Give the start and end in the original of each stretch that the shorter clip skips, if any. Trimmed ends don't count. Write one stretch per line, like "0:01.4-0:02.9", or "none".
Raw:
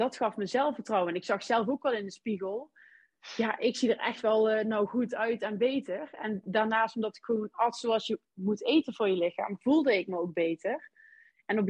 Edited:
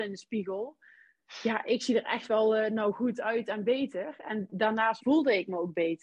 0:06.9-0:09.6